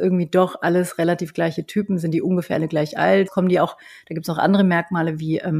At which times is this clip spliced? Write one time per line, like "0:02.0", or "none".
0:03.3